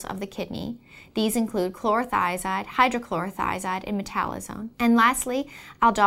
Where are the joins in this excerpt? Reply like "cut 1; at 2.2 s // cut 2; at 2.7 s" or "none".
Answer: cut 1; at 4.7 s